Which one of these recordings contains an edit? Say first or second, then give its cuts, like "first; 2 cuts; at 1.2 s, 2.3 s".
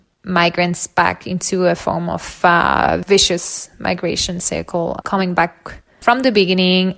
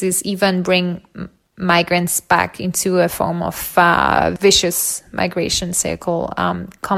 first; 1 cut; at 5.0 s